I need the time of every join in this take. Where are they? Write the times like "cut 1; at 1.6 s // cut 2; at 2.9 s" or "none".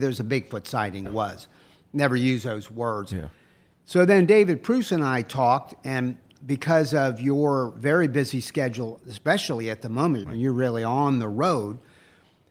cut 1; at 1.0 s // cut 2; at 10.2 s